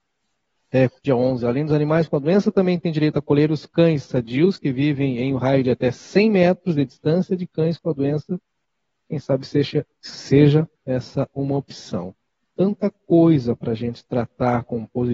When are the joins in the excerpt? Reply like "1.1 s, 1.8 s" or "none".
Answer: 1.0 s, 10.7 s